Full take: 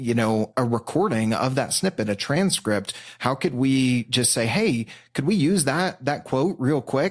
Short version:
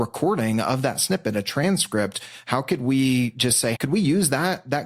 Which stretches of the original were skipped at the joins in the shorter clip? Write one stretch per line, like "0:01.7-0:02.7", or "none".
0:04.5-0:05.1